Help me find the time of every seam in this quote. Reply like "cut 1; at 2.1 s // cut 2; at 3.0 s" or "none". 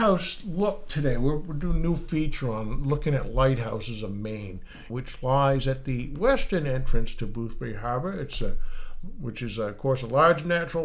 cut 1; at 4.9 s